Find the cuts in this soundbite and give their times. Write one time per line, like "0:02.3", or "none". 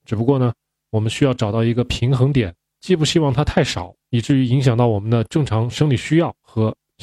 none